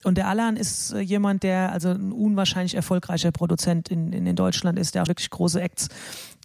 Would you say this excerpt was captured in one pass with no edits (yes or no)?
no